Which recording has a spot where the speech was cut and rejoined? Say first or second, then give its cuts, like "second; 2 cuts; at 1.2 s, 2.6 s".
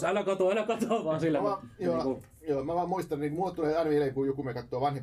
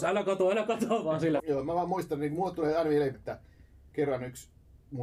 second; 2 cuts; at 1.4 s, 3.1 s